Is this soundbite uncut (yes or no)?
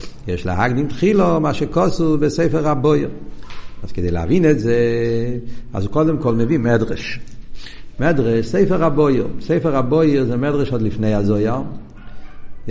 yes